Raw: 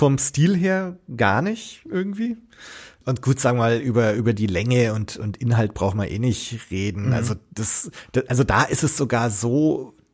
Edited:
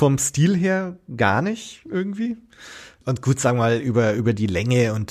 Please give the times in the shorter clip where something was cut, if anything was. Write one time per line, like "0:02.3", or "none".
none